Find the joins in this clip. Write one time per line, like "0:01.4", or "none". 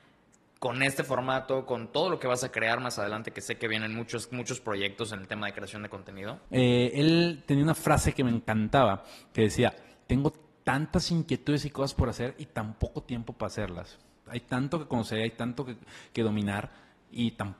0:06.4
0:14.3

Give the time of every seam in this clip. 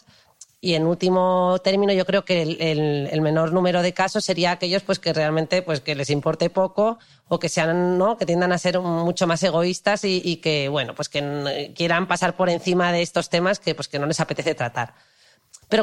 none

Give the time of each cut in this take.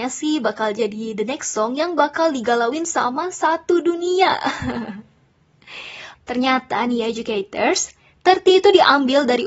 0:06.1

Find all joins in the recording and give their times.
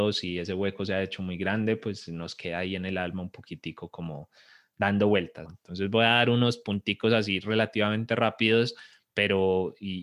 0:05.4

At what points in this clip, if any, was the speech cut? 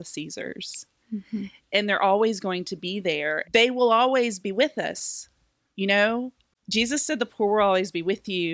0:03.4

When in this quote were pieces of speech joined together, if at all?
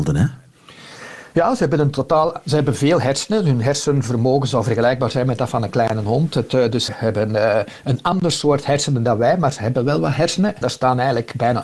0:06.9
0:10.6

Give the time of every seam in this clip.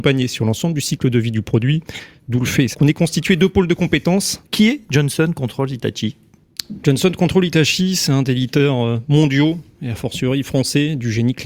0:02.7
0:04.4

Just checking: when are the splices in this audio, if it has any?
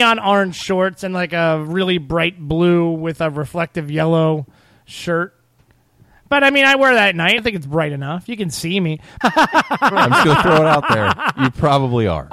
0:07.4
0:09.2

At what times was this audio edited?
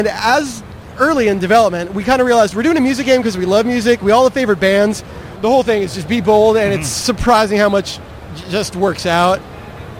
0:05.4

